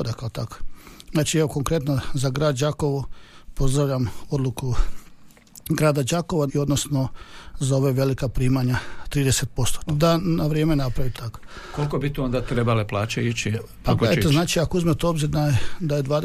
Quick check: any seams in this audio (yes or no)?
yes